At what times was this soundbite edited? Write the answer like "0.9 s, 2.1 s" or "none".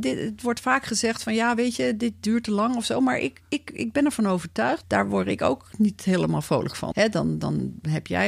4.8 s, 6.9 s

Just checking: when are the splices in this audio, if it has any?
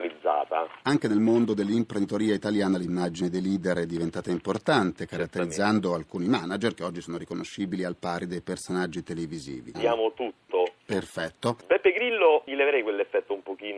9.7 s

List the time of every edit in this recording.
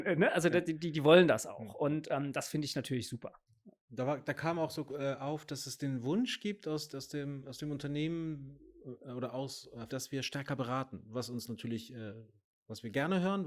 3.8 s, 9.9 s

